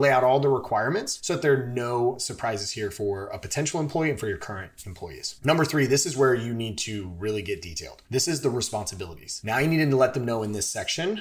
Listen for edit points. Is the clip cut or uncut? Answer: uncut